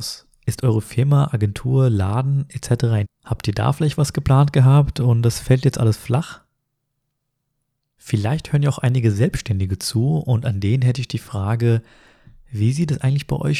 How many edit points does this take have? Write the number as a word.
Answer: one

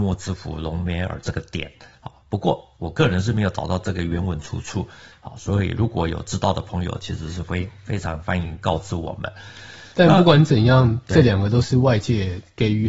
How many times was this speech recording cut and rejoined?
zero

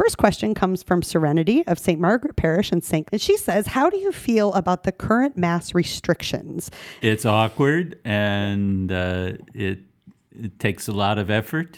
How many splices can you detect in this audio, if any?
two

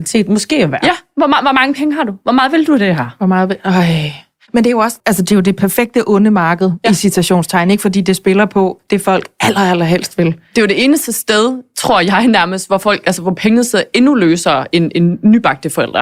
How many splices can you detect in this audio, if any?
one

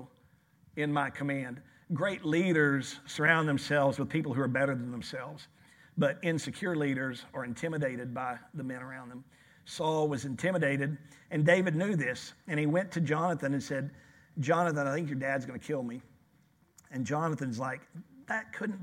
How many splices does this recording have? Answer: zero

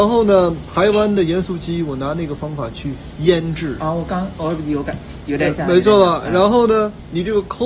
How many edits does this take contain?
zero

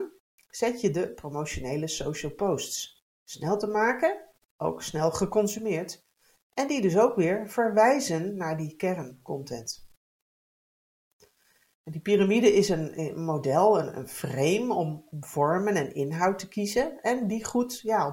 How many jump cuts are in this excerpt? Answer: zero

